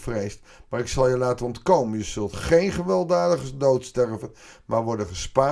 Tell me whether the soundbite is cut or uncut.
uncut